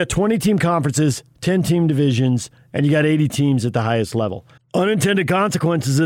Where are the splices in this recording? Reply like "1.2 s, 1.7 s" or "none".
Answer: 4.6 s